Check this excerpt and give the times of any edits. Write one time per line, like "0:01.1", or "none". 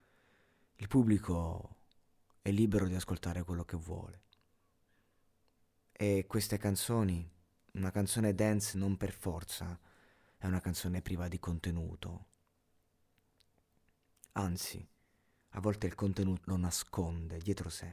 0:16.4